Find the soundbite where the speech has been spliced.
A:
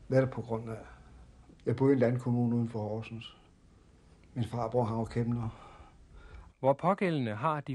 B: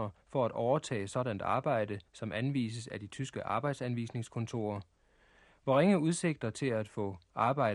A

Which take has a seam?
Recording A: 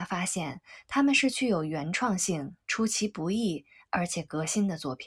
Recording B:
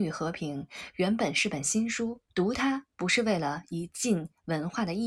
B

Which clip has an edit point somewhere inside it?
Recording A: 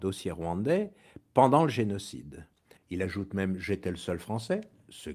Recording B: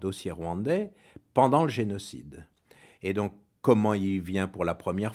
A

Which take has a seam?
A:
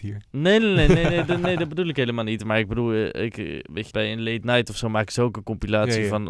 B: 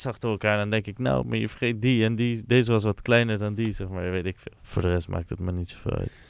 A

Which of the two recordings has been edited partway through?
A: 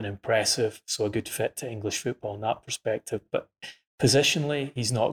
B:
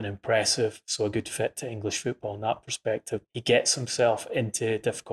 B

